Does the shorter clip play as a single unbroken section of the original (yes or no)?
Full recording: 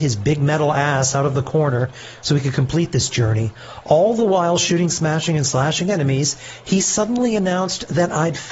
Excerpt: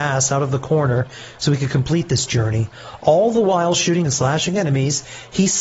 no